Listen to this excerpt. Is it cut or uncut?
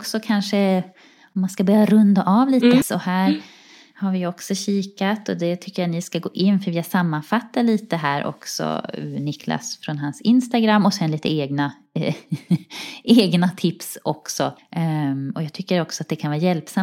cut